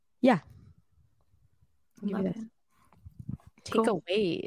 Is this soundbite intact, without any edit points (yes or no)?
yes